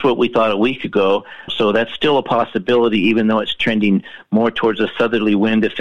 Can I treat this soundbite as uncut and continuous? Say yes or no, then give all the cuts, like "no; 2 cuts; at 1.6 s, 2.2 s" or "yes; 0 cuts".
no; 1 cut; at 1.5 s